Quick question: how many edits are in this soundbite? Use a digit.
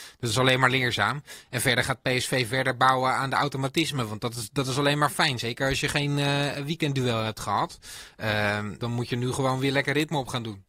1